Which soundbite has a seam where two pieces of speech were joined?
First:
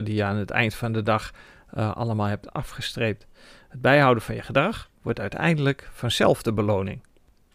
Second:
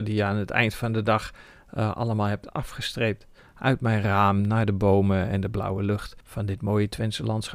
second; 2 cuts; at 3.4 s, 6.2 s

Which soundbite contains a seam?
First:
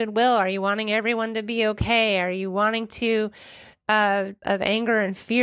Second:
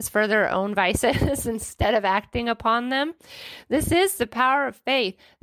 first; 1 cut; at 4.4 s

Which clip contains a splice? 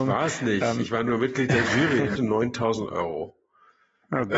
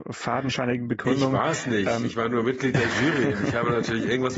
first; 1 cut; at 2.2 s

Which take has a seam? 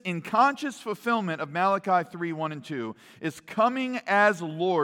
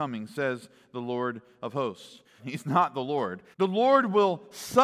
second; 2 cuts; at 2.4 s, 3.5 s

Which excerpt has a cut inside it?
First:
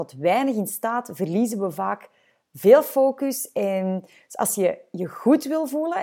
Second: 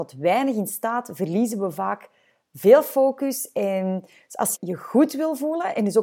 second; 1 cut; at 4.5 s

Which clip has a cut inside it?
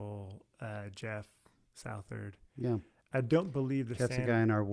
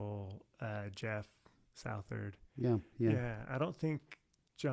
second; 1 cut; at 2.9 s

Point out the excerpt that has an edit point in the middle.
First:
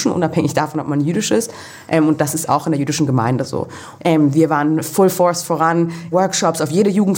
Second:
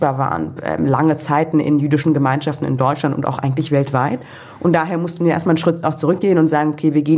first; 2 cuts; at 4.0 s, 6.1 s

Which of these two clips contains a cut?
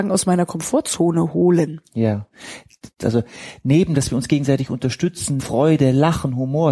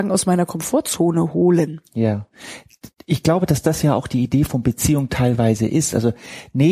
first; 2 cuts; at 3.0 s, 5.4 s

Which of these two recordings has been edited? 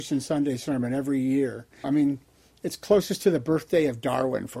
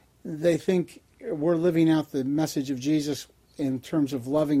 first; 1 cut; at 1.8 s

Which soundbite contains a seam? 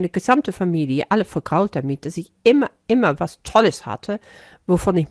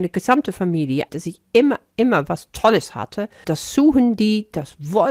second; 2 cuts; at 1.1 s, 3.4 s

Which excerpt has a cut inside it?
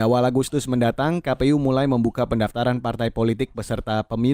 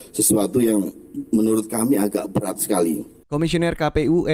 second; 1 cut; at 3.2 s

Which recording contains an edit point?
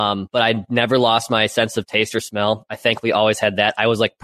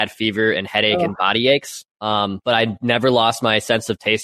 second; 1 cut; at 1.9 s

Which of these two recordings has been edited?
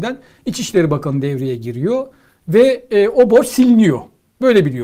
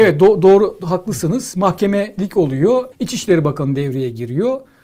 second; 1 cut; at 2.9 s

